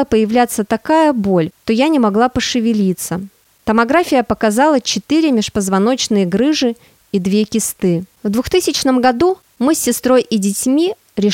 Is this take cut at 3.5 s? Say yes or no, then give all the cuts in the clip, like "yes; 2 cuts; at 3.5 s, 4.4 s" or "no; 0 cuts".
no; 1 cut; at 8.1 s